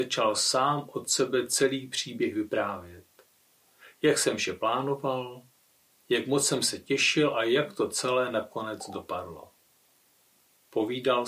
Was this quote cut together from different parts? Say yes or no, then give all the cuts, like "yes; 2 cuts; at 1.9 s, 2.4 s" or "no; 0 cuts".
no; 0 cuts